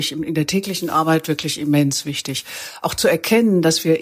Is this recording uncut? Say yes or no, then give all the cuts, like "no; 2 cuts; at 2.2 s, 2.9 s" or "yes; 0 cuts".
yes; 0 cuts